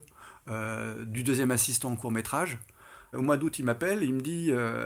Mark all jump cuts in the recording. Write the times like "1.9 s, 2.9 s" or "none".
3.1 s